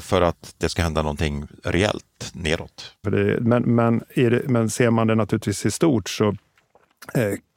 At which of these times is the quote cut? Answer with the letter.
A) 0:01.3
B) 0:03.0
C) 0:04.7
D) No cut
B